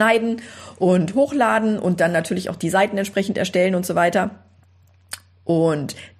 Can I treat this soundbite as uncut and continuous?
yes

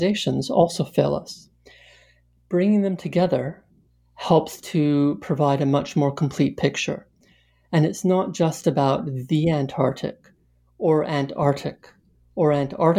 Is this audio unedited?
yes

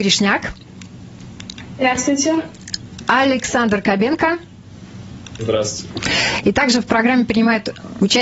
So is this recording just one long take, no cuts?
yes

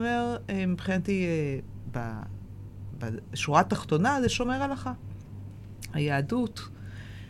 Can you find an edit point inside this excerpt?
no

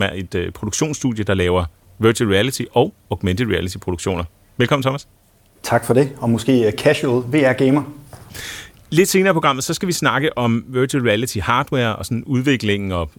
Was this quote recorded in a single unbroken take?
yes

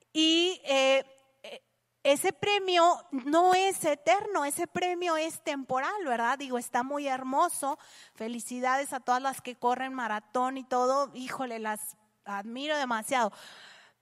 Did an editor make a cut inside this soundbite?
yes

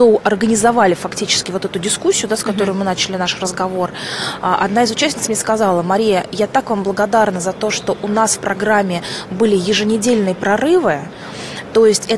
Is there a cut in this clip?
no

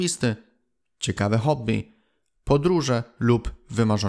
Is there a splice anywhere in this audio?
no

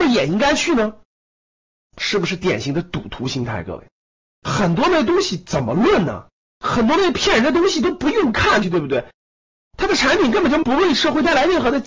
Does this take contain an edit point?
yes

